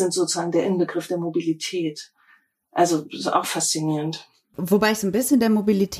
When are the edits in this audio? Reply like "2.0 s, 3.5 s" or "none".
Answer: none

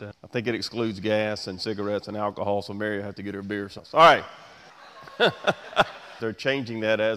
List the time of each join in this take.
6.2 s

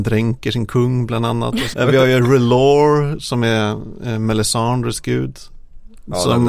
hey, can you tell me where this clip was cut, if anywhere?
1.7 s

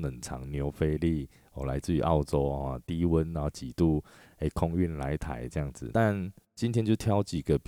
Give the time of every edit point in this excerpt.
5.9 s

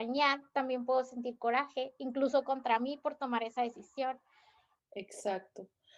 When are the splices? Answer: 4.8 s

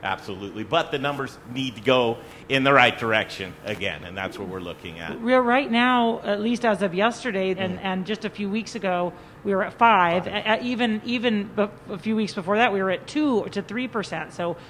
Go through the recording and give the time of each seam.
7.6 s

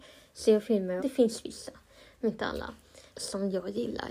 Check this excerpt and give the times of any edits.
1.0 s, 3.1 s

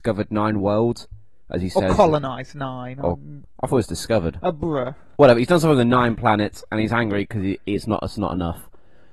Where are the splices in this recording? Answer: none

